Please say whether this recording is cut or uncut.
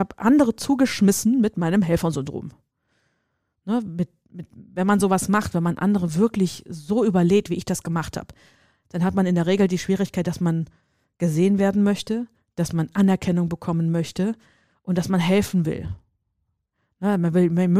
uncut